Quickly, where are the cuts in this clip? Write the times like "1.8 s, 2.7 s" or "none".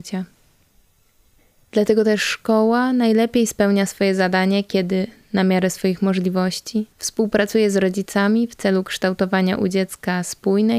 1.5 s, 6.9 s